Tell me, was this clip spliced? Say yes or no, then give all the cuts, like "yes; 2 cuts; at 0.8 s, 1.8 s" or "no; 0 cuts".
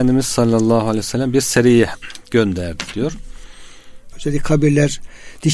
yes; 1 cut; at 4.1 s